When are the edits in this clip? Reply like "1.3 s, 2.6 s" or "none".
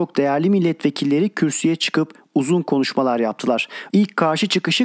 3.9 s